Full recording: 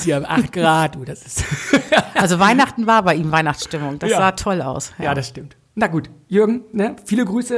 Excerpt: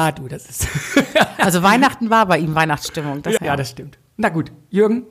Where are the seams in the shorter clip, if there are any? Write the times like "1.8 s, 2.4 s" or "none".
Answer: 3.4 s